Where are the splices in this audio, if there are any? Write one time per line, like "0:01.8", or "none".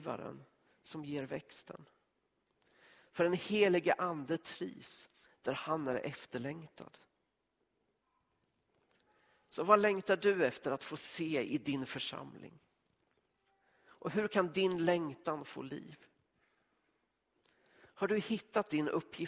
none